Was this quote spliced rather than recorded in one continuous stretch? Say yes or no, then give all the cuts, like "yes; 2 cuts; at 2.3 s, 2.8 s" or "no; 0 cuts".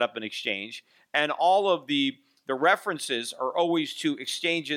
no; 0 cuts